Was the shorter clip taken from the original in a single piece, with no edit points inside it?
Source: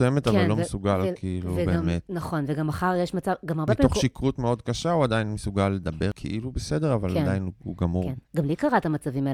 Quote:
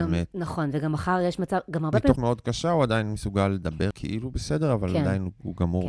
no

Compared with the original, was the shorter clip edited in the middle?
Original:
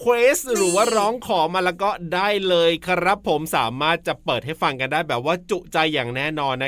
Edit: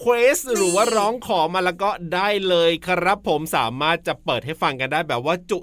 no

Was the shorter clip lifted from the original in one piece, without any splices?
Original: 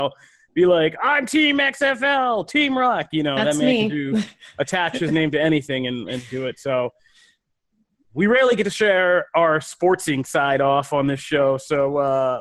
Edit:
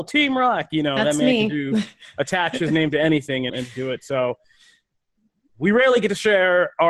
no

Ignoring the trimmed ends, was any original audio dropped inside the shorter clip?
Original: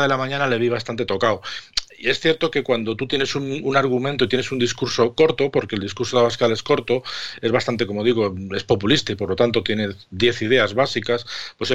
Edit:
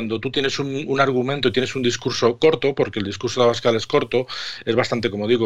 no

